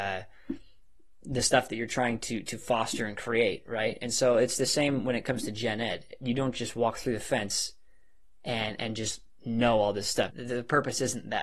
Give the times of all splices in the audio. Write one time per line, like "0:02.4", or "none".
0:10.3